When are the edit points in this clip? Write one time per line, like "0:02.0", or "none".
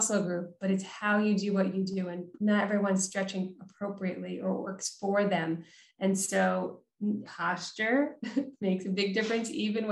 0:07.3